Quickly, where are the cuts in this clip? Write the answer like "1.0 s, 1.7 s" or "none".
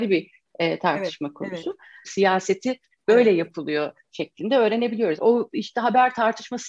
2.0 s, 5.2 s